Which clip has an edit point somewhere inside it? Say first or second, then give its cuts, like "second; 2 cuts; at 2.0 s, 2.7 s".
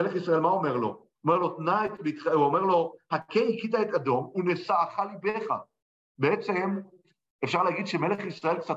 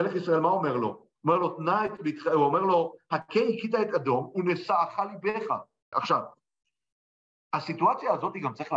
second; 1 cut; at 5.9 s